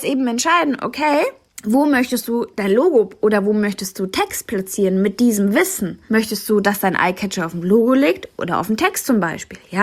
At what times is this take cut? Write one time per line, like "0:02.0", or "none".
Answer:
0:06.1